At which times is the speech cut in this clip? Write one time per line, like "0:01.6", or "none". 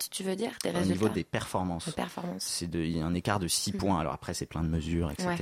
none